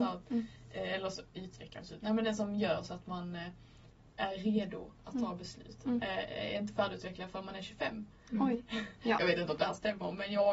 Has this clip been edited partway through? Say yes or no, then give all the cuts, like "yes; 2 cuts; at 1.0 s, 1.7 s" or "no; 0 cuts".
no; 0 cuts